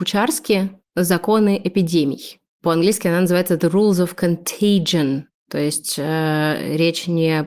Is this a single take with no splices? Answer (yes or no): yes